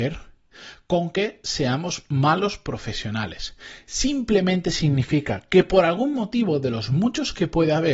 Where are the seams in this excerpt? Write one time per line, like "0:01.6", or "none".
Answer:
none

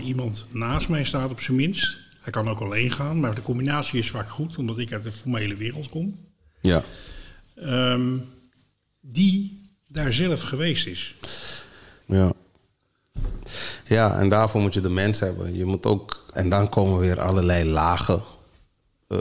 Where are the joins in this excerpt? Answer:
0:12.0
0:16.3

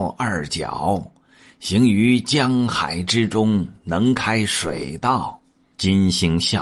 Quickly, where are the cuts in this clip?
0:05.7

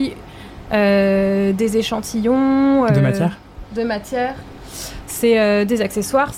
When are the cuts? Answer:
none

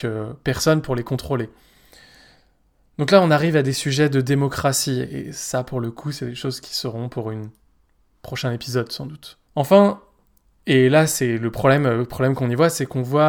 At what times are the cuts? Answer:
0:09.4

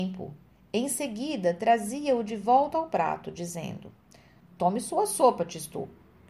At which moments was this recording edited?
none

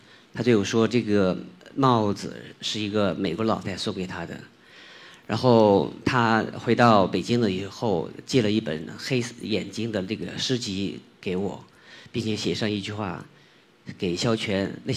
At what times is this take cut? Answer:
0:03.6

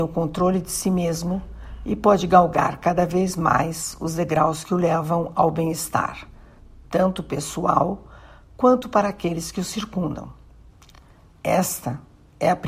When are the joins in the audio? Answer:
none

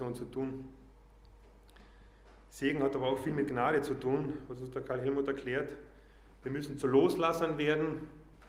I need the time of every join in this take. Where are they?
none

